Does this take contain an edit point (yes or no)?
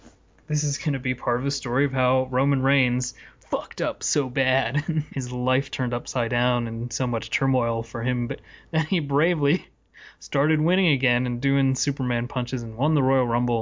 yes